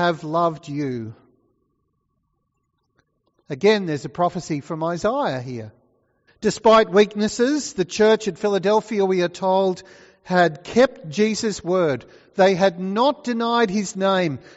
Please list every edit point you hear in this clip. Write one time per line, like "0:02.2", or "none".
0:06.3